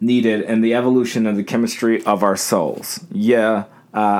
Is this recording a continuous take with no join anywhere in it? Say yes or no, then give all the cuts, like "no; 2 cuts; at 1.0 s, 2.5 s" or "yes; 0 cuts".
yes; 0 cuts